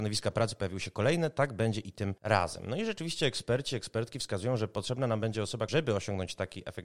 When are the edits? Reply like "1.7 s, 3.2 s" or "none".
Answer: 2.2 s, 5.7 s